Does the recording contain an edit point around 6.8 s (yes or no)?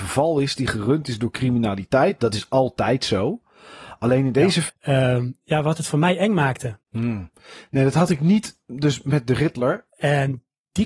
yes